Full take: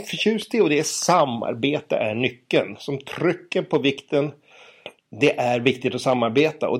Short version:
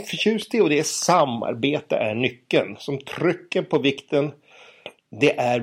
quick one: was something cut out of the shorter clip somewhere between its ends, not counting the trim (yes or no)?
no